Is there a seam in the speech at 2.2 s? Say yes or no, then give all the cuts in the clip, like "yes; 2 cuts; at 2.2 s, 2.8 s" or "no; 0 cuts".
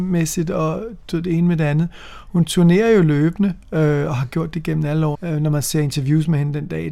no; 1 cut; at 5.1 s